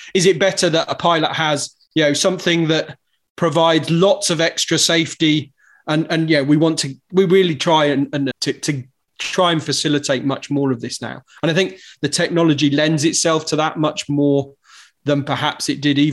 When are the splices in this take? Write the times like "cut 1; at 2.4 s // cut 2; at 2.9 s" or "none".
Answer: cut 1; at 8.3 s